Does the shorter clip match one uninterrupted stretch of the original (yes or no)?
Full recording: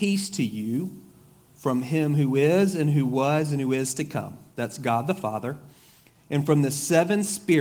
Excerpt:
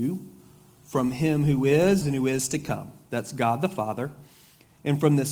no